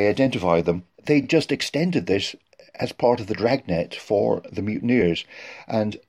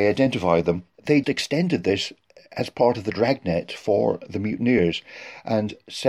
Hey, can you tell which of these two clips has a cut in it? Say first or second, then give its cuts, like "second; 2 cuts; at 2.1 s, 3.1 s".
second; 1 cut; at 1.2 s